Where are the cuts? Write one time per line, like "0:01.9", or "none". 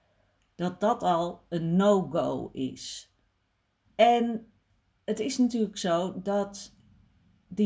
0:03.9

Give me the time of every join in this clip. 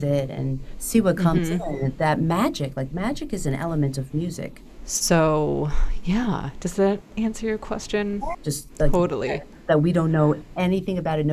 0:04.8
0:08.3

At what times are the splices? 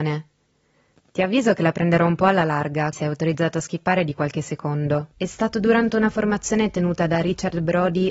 0:02.9
0:05.1

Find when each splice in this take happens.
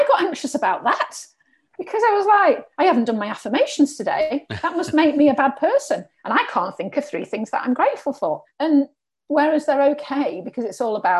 0:08.5

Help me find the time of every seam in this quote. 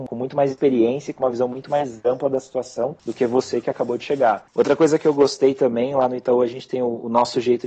0:04.5

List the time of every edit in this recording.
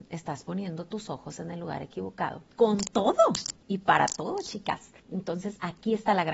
0:02.5
0:05.0

